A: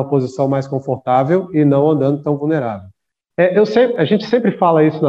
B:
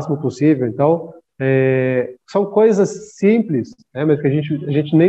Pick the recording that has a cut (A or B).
A